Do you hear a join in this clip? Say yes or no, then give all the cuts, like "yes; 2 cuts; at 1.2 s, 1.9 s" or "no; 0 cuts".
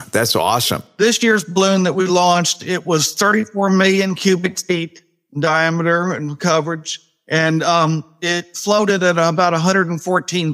no; 0 cuts